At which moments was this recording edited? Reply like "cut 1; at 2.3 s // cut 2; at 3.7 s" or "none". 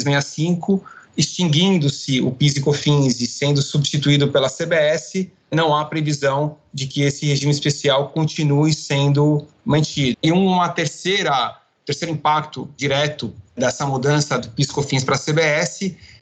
cut 1; at 1.1 s // cut 2; at 10.1 s